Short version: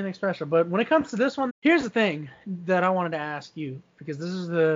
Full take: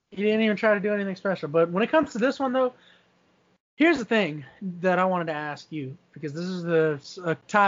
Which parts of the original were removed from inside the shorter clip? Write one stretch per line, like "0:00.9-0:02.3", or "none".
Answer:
0:02.5-0:03.6